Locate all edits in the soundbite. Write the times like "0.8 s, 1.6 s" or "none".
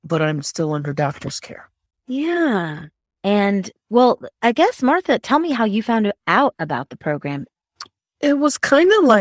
3.1 s